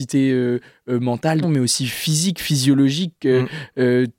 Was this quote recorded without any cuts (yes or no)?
no